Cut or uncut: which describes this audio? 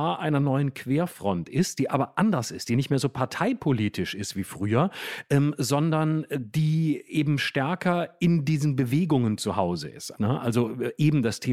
cut